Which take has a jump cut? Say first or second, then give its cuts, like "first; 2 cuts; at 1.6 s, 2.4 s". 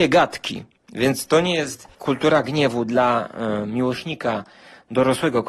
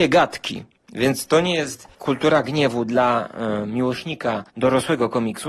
second; 1 cut; at 4.5 s